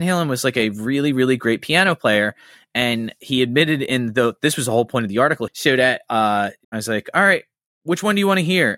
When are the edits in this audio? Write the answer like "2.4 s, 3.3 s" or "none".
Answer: 5.5 s, 6.6 s